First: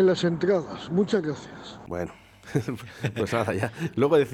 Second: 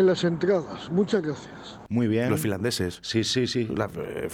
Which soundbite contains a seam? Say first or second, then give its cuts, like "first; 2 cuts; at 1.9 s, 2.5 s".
second; 1 cut; at 1.9 s